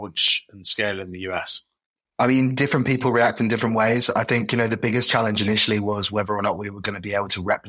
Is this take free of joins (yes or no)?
yes